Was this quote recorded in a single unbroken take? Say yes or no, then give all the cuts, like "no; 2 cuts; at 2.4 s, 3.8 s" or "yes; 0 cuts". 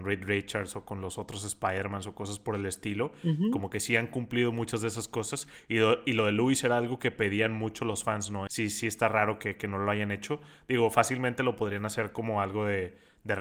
no; 1 cut; at 8.5 s